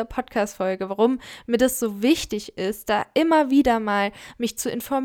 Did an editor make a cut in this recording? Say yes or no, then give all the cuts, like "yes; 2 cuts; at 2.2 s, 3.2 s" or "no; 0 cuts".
no; 0 cuts